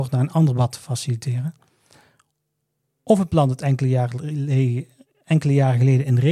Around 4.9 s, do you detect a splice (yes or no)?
no